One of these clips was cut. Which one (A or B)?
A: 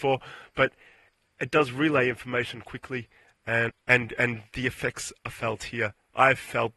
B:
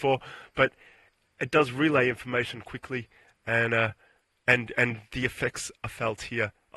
A